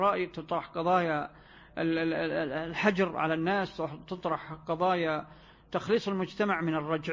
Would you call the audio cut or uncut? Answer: uncut